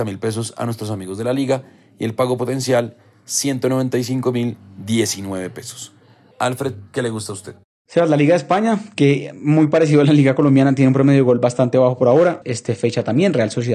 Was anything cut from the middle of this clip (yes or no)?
yes